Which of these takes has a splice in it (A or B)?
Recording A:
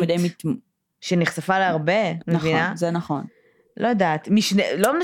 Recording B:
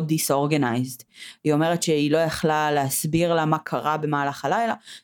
A